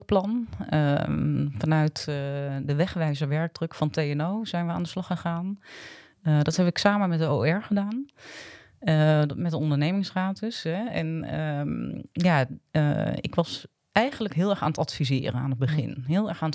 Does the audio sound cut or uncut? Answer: uncut